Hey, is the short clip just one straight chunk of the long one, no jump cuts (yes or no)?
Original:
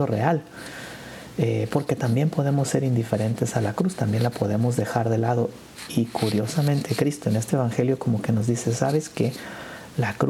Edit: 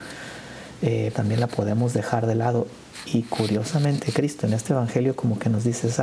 no